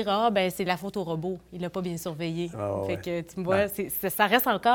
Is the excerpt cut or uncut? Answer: uncut